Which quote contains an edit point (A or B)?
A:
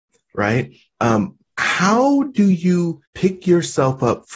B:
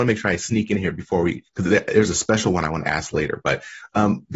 A